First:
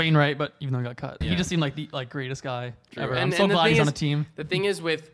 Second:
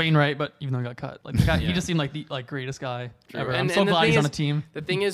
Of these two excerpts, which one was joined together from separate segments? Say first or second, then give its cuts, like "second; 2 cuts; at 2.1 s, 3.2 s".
first; 1 cut; at 1.2 s